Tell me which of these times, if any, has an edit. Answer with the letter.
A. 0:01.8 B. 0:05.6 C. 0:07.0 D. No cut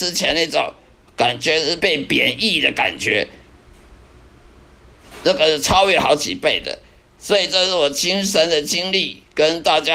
A